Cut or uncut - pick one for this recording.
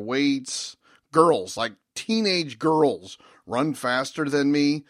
uncut